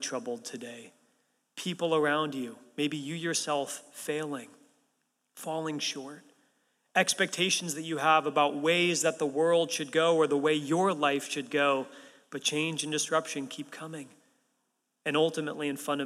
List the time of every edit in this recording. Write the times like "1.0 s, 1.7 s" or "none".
none